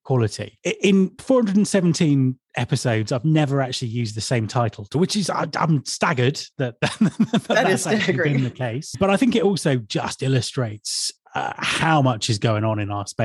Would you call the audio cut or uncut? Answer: uncut